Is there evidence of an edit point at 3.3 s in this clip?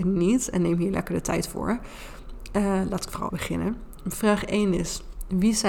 yes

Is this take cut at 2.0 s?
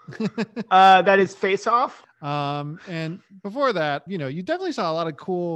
yes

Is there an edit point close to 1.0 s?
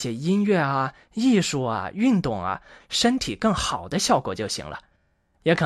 no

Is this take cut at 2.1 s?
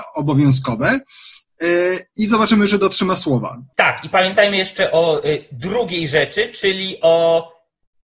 no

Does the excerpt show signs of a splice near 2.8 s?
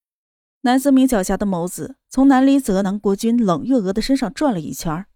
no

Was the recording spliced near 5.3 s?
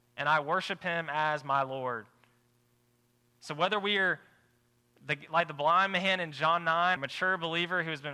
no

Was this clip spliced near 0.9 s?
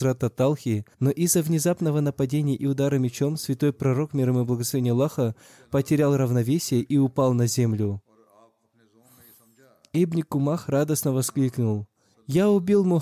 yes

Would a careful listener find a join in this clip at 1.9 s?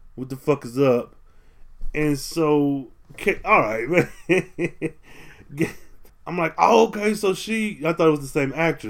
no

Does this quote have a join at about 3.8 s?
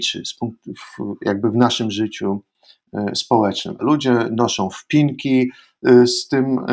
yes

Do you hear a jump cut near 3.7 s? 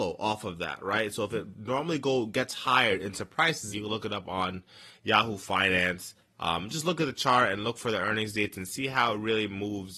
yes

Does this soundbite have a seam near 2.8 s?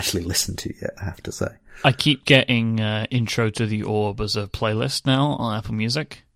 no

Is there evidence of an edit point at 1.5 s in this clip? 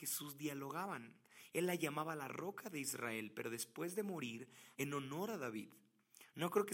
yes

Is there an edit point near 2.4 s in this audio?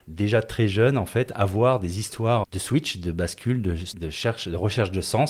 yes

